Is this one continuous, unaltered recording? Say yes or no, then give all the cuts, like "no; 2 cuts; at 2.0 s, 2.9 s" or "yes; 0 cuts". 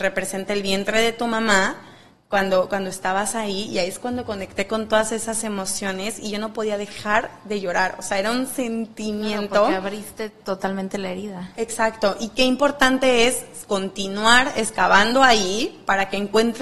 yes; 0 cuts